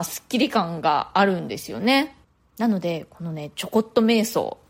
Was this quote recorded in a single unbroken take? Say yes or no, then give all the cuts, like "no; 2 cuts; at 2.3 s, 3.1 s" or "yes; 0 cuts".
yes; 0 cuts